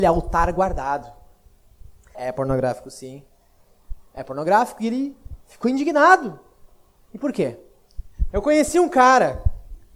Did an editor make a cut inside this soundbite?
yes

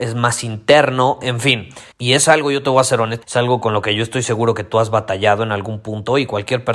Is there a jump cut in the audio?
yes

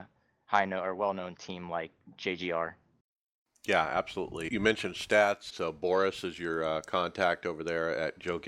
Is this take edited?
yes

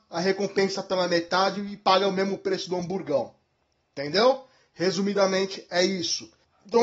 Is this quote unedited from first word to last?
yes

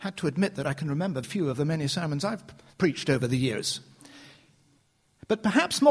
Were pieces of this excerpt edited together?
yes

